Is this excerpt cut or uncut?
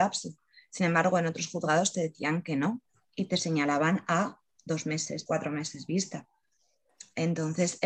cut